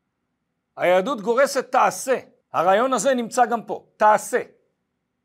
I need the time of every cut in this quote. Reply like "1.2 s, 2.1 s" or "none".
2.4 s